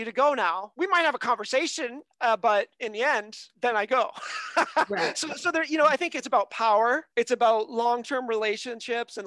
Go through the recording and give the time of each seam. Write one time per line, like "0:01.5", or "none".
none